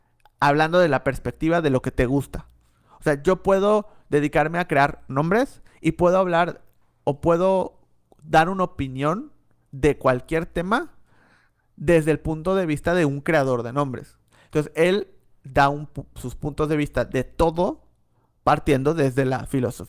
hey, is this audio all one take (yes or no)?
yes